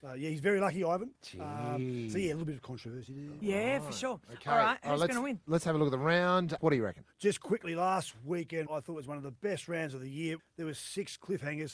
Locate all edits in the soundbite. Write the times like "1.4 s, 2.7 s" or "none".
6.6 s, 8.7 s, 10.4 s